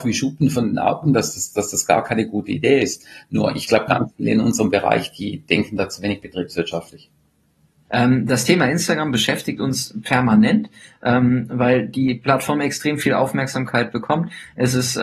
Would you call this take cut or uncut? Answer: cut